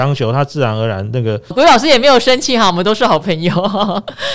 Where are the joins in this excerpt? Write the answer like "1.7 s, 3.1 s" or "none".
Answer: 1.5 s